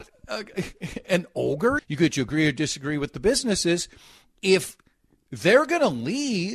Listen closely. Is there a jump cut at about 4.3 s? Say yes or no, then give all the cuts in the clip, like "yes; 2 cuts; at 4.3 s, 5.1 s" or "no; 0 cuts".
no; 1 cut; at 1.8 s